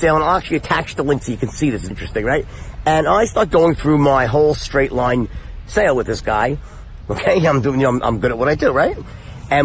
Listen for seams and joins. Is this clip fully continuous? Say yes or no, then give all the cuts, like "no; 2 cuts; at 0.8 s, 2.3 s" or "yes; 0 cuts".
no; 2 cuts; at 1.9 s, 7.0 s